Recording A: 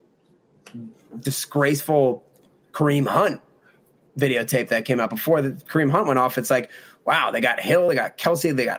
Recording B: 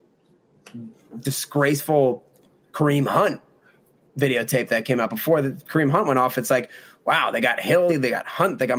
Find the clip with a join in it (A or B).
B